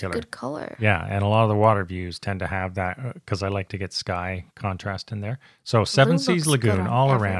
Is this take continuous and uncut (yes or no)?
yes